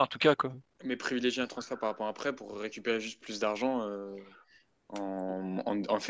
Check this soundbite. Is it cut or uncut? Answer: uncut